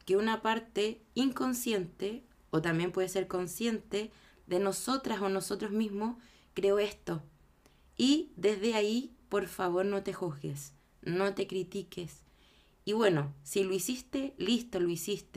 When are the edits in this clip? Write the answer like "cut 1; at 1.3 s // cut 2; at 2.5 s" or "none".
none